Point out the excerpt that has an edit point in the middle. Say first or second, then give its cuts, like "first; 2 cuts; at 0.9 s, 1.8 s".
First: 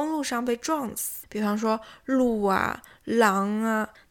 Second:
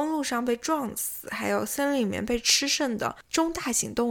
first; 1 cut; at 1.2 s